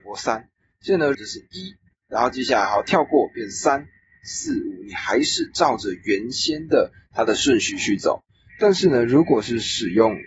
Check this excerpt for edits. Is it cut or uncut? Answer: cut